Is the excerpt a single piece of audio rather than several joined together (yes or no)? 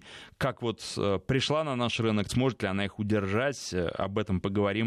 no